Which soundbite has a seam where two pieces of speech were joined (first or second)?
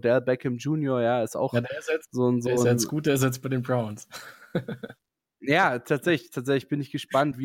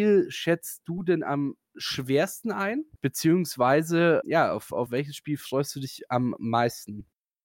second